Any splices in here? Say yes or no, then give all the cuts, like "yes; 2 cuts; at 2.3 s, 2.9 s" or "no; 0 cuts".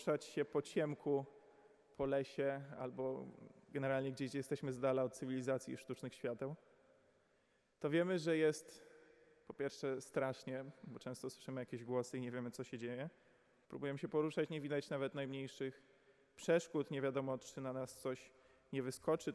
yes; 1 cut; at 13.6 s